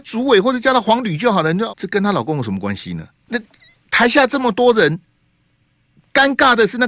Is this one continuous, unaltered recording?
no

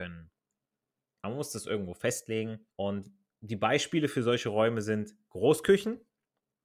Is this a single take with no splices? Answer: no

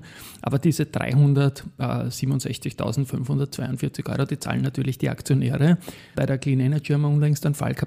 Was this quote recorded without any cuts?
no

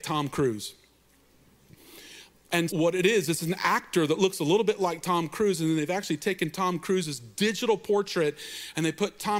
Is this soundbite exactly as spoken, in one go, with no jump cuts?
no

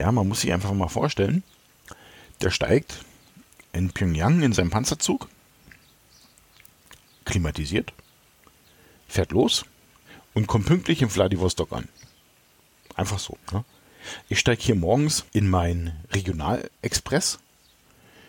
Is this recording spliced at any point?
yes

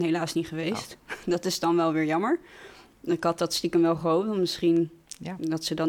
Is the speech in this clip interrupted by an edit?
no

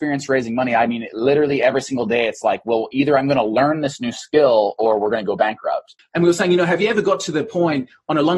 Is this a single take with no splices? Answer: no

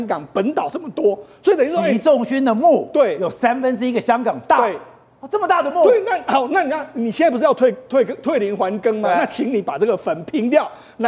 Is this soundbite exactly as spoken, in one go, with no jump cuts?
yes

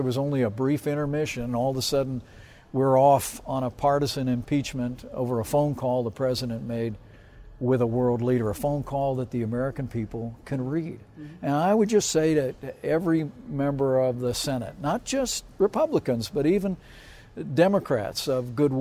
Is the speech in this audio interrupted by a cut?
no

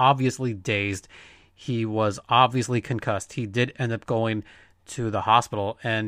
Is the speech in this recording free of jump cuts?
yes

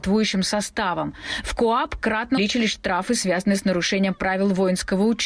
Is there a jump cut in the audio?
yes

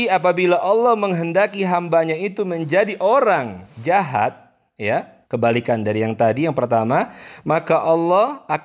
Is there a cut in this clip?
yes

